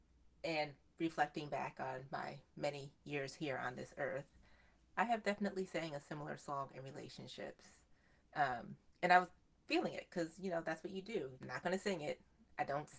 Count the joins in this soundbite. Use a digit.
2